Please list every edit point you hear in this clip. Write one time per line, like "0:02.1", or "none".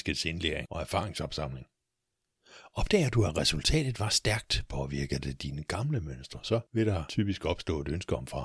none